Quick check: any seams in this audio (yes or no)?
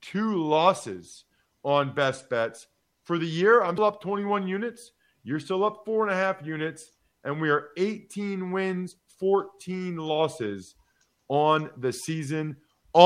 yes